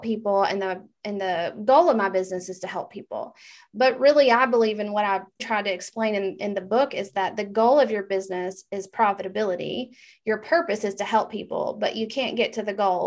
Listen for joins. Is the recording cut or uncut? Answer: cut